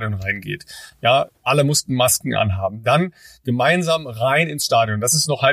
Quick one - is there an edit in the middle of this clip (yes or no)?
no